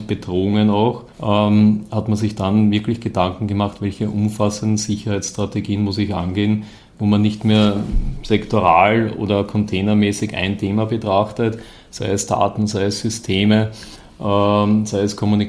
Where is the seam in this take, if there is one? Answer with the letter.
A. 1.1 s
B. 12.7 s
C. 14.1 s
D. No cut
A